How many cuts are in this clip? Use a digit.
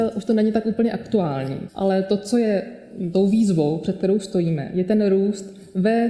1